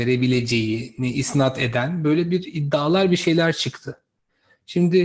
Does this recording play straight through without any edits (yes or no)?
yes